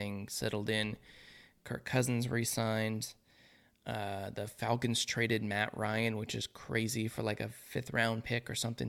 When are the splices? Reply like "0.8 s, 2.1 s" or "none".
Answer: none